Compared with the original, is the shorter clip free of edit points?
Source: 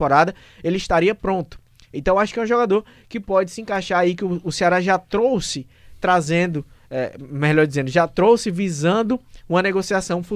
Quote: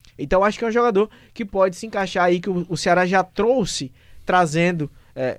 yes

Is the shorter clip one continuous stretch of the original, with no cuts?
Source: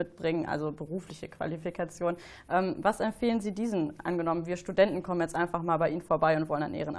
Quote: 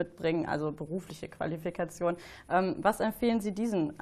yes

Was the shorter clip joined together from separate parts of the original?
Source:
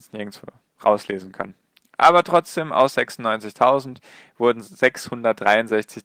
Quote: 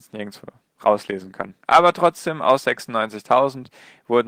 yes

